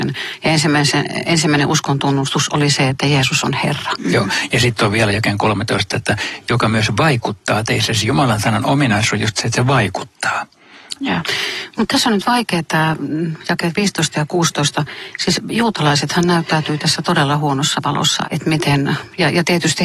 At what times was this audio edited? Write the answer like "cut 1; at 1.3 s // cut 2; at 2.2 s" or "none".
cut 1; at 11.0 s // cut 2; at 18.2 s